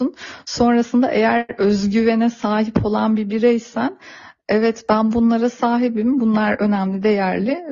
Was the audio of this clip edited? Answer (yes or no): no